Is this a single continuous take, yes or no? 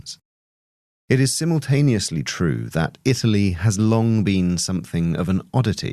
yes